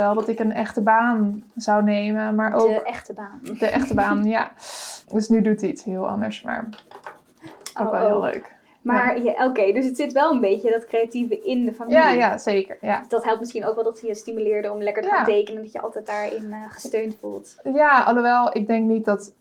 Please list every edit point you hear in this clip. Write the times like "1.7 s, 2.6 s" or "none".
5.0 s